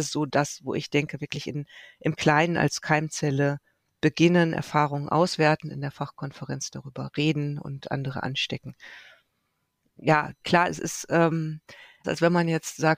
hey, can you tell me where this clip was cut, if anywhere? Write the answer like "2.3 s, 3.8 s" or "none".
10.4 s, 12.0 s